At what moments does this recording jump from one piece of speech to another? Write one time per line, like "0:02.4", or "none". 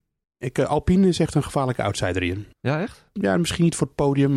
0:02.5

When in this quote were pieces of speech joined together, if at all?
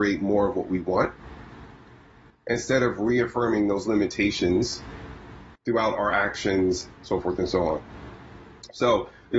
0:05.5
0:07.0

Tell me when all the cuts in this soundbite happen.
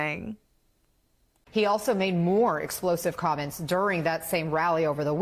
none

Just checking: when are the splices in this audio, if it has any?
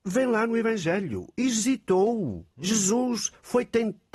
0:02.5

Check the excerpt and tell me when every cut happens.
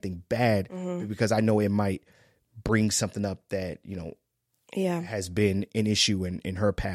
none

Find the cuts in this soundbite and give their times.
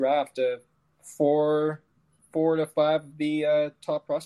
none

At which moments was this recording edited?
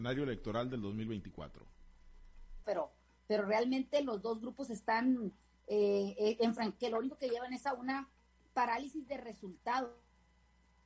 0:02.6
0:06.7

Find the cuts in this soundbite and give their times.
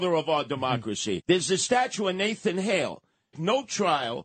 0:01.2
0:03.3

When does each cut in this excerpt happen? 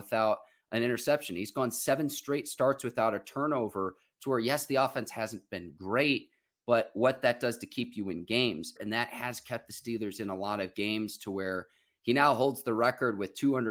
0:08.8

